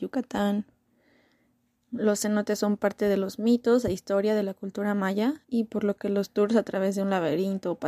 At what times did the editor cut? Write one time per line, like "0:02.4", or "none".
0:01.8
0:05.4